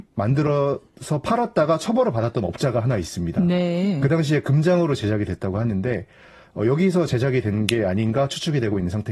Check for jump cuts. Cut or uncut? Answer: uncut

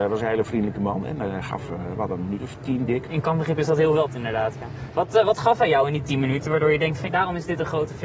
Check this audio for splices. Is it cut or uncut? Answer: cut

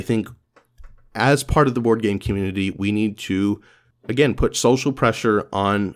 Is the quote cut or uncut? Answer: uncut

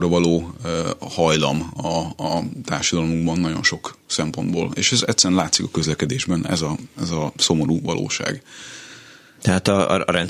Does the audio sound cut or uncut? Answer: uncut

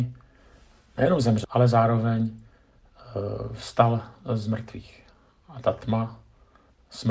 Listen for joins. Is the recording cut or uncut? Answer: cut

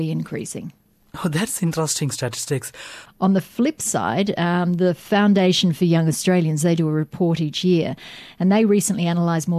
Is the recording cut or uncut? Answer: cut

